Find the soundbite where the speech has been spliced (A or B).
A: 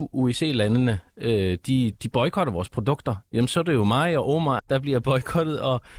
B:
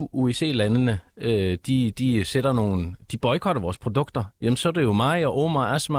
A